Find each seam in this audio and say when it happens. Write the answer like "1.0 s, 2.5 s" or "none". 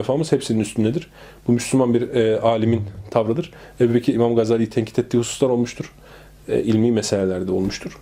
4.1 s